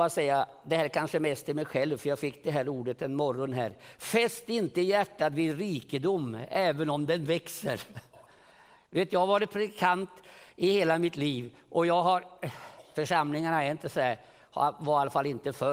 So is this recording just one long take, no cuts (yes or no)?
yes